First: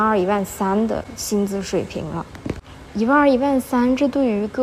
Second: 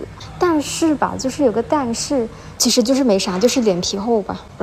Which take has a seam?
second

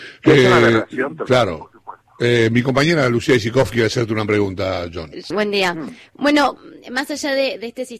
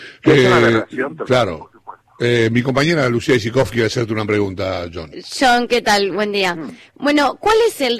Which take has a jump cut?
first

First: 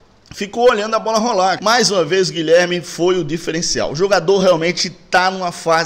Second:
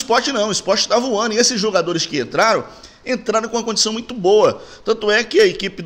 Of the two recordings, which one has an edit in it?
first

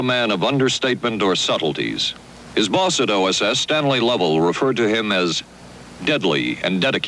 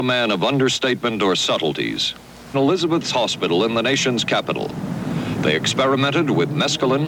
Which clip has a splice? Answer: second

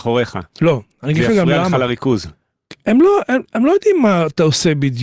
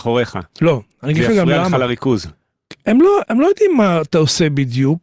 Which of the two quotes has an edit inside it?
second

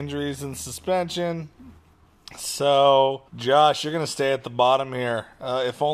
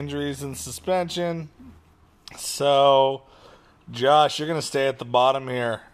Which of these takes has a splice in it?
first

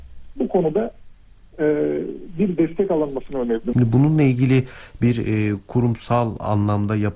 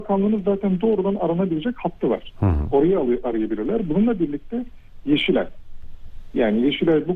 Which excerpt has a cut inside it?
first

